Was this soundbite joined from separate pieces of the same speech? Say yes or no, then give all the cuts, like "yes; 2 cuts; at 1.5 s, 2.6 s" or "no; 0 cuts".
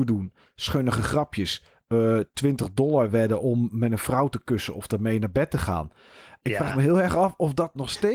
no; 0 cuts